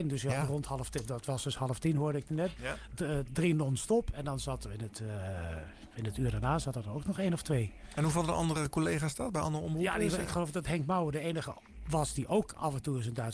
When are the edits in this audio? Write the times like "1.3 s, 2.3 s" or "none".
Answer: none